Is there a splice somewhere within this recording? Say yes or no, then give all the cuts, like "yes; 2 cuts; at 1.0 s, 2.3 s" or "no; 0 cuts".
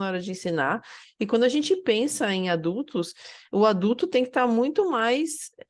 no; 0 cuts